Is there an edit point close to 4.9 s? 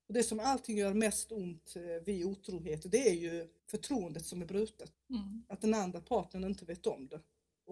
yes; 2 cuts; at 3.6 s, 4.9 s

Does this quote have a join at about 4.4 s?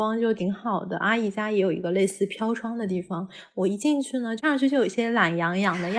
yes; 1 cut; at 4.4 s

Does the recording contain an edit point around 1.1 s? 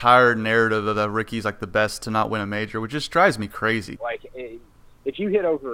no; 1 cut; at 4.0 s

